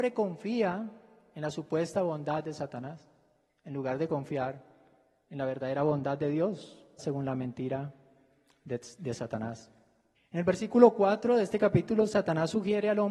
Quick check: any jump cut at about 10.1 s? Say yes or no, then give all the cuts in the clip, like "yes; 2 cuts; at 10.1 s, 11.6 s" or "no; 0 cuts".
yes; 2 cuts; at 7.0 s, 10.1 s